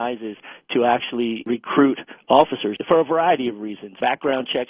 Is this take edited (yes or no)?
no